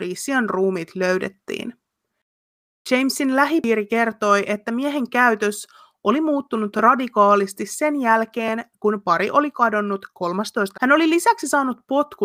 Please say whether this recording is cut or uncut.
cut